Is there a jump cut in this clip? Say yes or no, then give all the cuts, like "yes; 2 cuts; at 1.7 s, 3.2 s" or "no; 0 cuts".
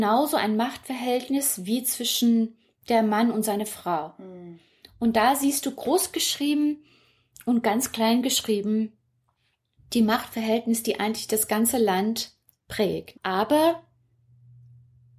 yes; 1 cut; at 13.2 s